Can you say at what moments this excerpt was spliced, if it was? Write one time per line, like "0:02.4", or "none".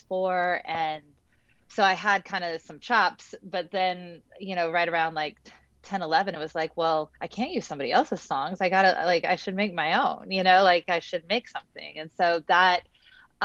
0:07.2